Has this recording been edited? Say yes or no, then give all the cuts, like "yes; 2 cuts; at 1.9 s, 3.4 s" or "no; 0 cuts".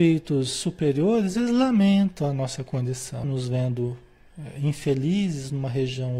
yes; 1 cut; at 3.2 s